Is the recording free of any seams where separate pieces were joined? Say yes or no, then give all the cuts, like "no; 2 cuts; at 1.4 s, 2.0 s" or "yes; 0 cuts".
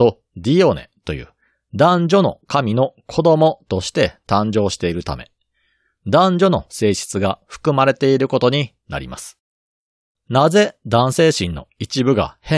no; 1 cut; at 10.2 s